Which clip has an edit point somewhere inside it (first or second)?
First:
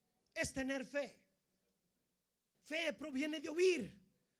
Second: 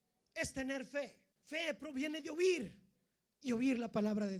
second